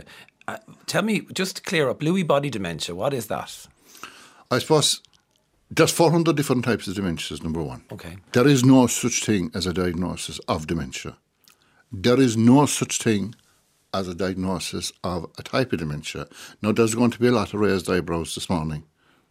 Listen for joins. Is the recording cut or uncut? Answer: cut